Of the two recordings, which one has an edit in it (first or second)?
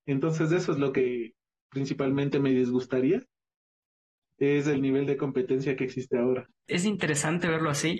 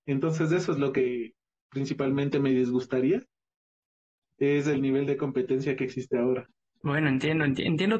first